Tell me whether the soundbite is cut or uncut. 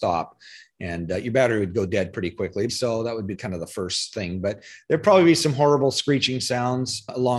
cut